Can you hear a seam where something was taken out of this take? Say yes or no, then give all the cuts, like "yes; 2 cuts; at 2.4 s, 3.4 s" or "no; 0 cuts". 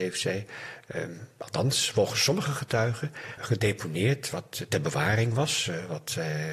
yes; 1 cut; at 3.4 s